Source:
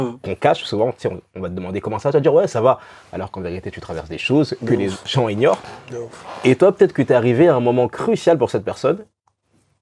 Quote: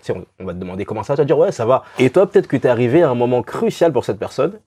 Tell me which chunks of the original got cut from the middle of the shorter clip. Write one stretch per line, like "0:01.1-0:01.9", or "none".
0:02.9-0:06.4